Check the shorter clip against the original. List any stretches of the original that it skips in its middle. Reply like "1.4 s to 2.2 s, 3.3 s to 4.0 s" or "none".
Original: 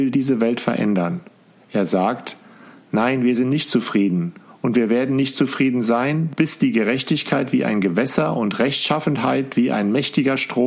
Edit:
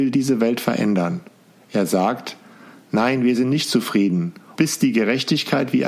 4.6 s to 6.3 s